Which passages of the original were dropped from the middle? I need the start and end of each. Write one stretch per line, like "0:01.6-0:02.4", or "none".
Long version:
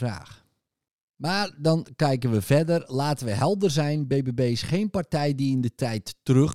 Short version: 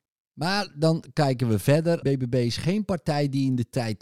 0:02.9-0:04.1